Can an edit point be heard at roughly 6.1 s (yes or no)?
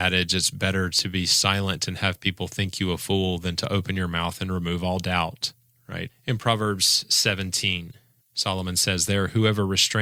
yes